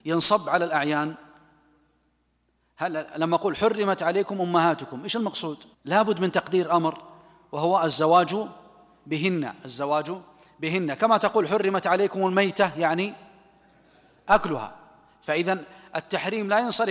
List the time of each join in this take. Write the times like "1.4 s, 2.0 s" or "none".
5.7 s